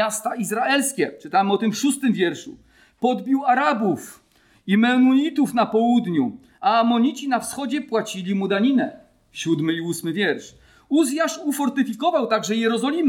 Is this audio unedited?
yes; 0 cuts

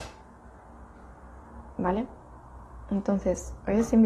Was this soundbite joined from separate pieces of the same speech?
no; 0 cuts

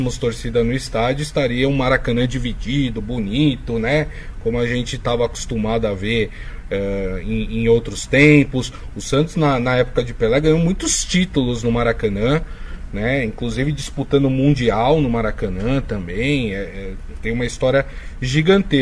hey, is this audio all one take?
no; 1 cut; at 8.9 s

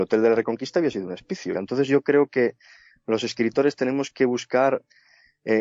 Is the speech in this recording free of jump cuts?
no; 1 cut; at 1.5 s

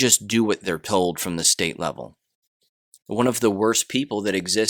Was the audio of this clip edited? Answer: yes; 1 cut; at 3.0 s

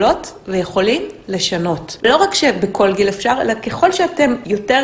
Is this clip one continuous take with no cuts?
no; 1 cut; at 2.0 s

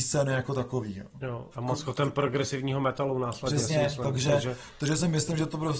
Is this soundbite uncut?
no; 1 cut; at 1.5 s

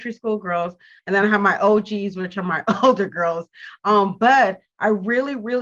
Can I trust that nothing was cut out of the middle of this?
no; 1 cut; at 1.0 s

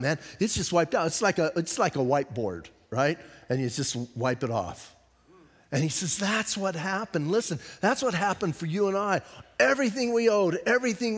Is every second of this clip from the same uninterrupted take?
yes; 0 cuts

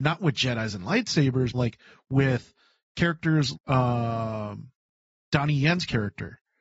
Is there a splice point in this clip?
yes; 2 cuts; at 1.5 s, 3.5 s

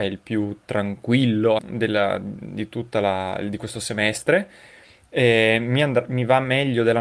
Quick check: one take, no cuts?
no; 1 cut; at 1.6 s

